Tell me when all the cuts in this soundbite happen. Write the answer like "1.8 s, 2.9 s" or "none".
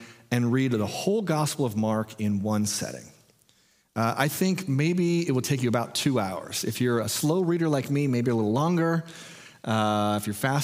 7.0 s